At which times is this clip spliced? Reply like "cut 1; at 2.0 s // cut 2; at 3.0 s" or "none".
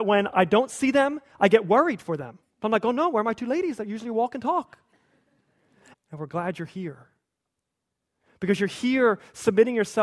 cut 1; at 2.4 s // cut 2; at 5.9 s